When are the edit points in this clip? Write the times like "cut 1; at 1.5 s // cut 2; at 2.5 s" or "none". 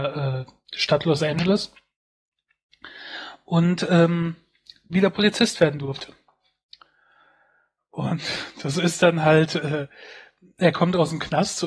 none